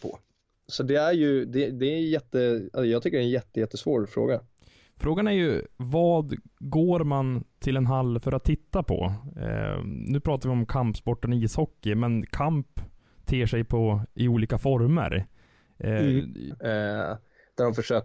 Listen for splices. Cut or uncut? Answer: cut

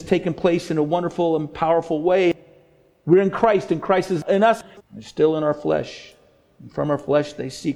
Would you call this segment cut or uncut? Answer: cut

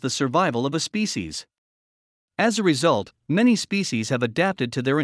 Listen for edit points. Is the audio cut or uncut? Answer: uncut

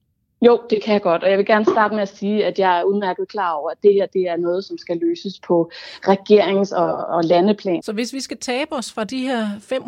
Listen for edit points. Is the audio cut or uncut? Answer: cut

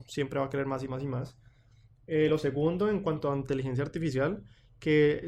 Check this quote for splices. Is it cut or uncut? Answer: uncut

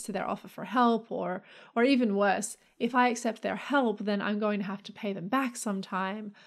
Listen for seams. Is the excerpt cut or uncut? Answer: uncut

